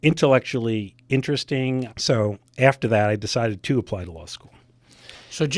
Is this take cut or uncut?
cut